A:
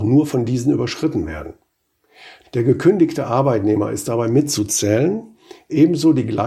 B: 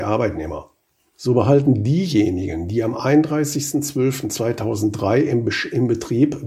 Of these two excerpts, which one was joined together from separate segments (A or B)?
A